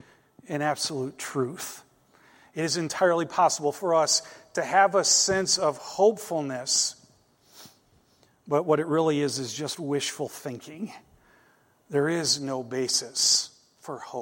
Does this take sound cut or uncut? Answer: uncut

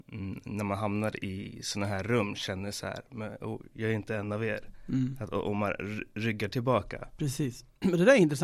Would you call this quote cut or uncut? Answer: uncut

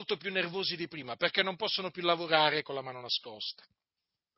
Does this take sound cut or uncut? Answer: uncut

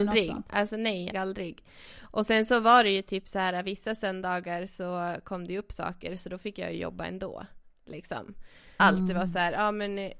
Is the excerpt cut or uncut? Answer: cut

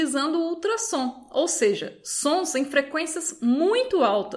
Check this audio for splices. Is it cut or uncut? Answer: uncut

